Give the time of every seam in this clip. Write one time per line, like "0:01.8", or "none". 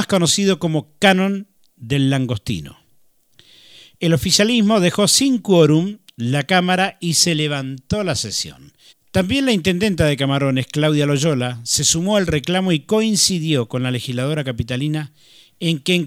0:08.9